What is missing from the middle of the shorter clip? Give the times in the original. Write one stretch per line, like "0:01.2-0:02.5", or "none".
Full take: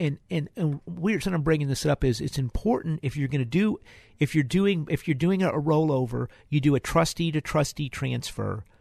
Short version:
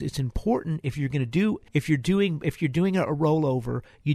0:03.9-0:04.1